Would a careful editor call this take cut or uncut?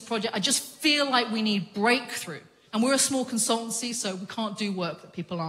cut